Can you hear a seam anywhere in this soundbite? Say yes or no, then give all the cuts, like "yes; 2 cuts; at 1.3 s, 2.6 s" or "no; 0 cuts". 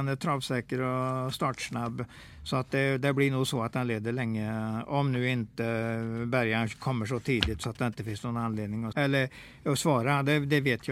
yes; 1 cut; at 8.9 s